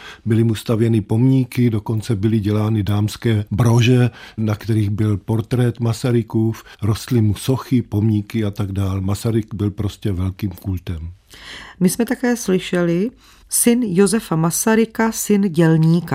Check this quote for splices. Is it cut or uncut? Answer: uncut